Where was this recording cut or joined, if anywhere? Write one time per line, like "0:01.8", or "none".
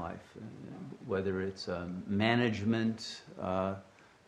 none